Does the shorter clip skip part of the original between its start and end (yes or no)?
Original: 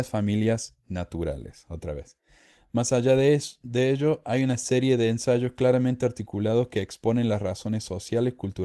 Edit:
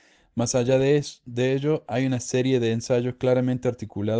no